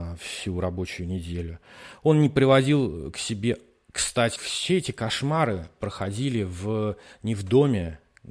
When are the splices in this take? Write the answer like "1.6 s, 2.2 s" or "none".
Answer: 4.4 s